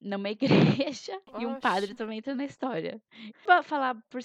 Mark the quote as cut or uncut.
cut